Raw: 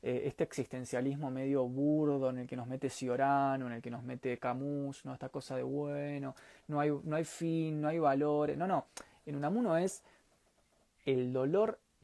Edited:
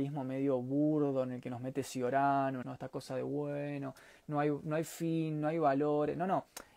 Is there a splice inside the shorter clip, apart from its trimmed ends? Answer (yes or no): yes